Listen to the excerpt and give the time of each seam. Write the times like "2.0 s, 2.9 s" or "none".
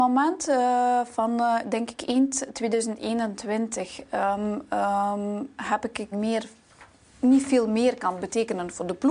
6.1 s